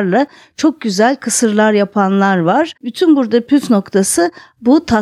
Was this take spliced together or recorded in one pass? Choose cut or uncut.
cut